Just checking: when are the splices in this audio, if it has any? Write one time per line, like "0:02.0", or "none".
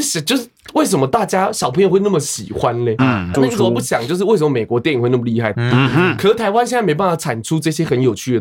0:03.3
0:05.5